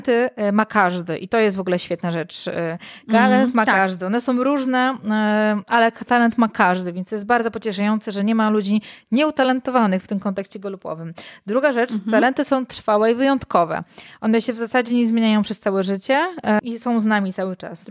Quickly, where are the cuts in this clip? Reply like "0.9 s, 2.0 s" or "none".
none